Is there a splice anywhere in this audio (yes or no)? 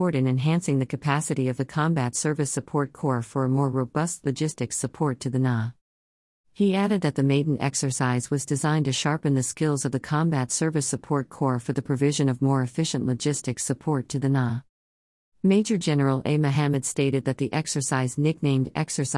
no